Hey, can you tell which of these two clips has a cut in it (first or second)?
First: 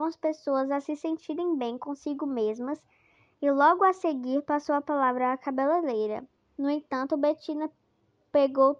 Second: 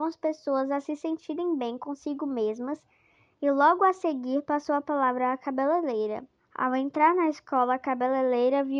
second